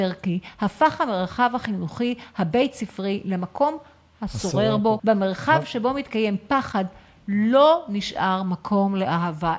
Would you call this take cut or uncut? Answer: cut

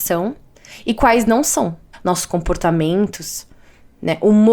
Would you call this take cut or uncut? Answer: cut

